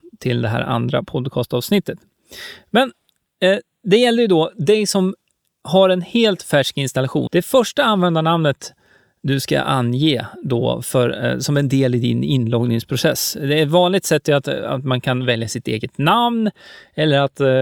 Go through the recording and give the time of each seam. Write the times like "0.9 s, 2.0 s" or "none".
7.3 s